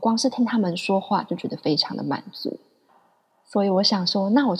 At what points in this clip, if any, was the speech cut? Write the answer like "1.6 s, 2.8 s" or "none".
2.9 s